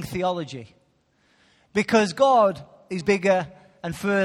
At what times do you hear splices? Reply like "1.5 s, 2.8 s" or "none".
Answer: 3.0 s